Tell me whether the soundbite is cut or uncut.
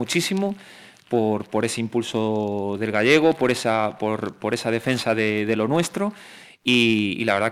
uncut